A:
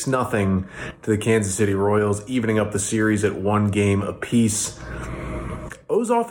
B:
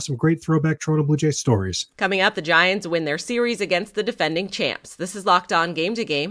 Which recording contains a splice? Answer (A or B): B